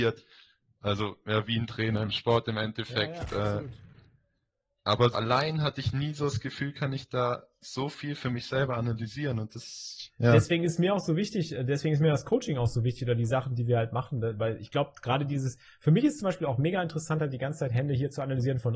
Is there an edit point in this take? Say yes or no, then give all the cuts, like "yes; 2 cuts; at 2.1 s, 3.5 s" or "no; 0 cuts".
yes; 1 cut; at 5.1 s